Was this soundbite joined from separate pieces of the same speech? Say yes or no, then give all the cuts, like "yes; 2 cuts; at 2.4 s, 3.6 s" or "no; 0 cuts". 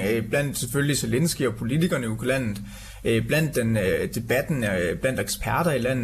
no; 0 cuts